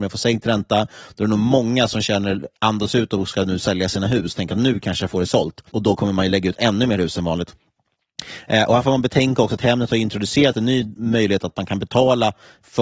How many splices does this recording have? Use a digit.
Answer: 1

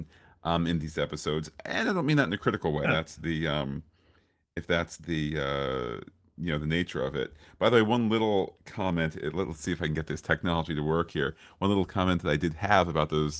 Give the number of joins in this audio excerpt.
1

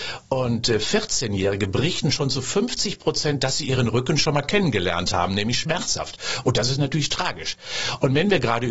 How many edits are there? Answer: 0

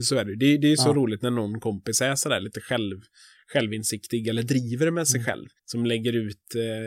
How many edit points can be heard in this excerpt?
1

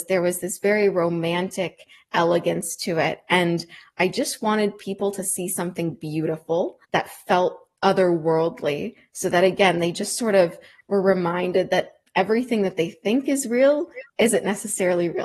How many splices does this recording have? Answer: 1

